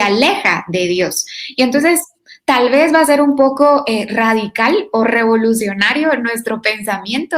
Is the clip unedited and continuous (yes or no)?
yes